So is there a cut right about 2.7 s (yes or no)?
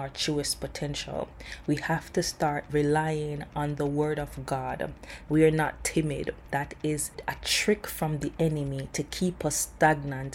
yes